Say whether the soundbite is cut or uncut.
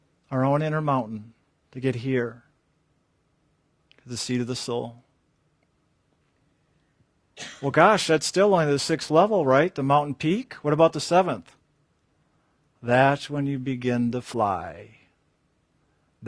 uncut